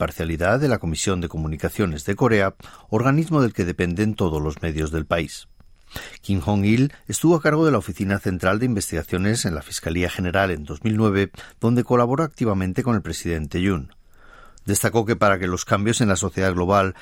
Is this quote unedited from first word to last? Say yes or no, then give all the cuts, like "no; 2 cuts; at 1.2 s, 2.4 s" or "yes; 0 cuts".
no; 2 cuts; at 7.0 s, 14.6 s